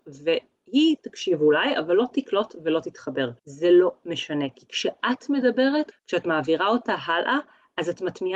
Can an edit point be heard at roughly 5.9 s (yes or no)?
yes